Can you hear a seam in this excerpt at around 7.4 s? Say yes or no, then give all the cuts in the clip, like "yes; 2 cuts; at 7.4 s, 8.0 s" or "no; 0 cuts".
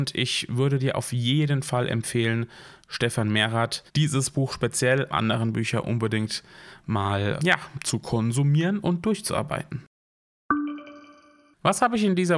yes; 3 cuts; at 3.9 s, 5.1 s, 7.4 s